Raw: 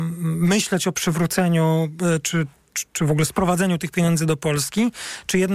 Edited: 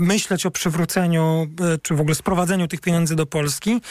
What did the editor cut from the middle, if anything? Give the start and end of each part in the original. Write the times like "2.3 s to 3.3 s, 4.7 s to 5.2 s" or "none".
2.2 s to 2.9 s